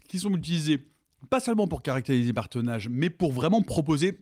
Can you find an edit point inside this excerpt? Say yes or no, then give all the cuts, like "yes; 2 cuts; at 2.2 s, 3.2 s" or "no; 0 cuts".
no; 0 cuts